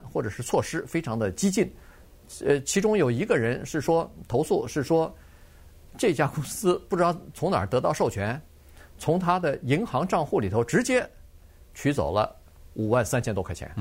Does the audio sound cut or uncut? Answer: uncut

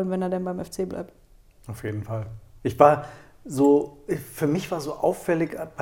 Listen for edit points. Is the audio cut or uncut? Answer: uncut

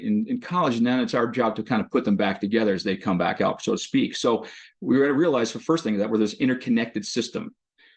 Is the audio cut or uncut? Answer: uncut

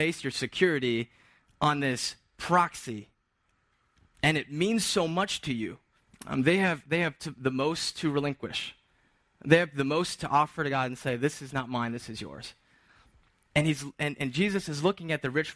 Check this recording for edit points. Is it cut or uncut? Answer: cut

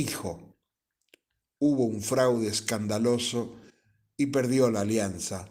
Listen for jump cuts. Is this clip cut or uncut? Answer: uncut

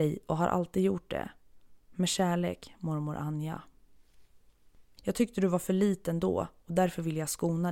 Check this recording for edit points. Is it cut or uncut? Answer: cut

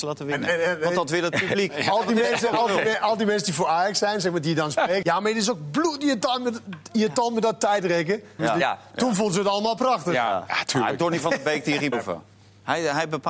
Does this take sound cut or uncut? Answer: cut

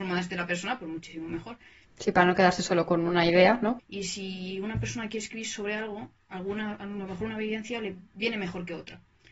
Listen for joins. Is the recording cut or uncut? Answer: cut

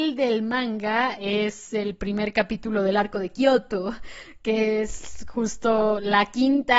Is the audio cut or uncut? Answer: uncut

